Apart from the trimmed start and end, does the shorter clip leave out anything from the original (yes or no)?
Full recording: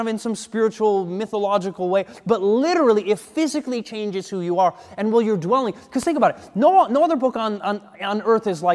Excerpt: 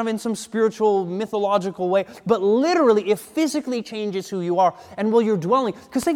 no